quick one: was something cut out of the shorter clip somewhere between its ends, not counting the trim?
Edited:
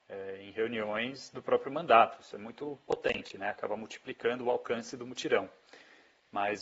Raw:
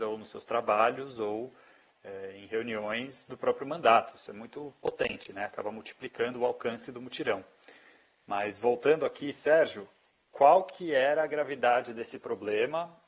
no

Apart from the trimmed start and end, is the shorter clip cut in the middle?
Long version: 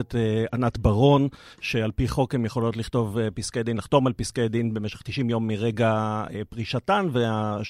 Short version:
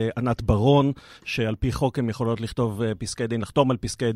no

